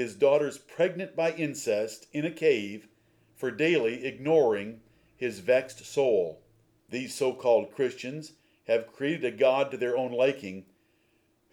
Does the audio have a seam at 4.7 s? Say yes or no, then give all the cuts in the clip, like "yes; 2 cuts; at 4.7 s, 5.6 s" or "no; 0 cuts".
no; 1 cut; at 6.8 s